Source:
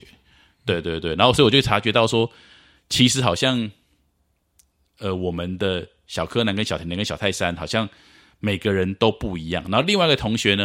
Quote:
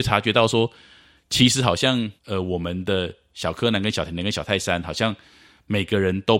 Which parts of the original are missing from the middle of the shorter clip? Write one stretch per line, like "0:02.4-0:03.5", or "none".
0:03.8-0:04.9